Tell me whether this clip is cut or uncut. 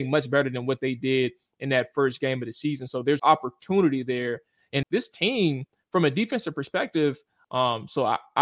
cut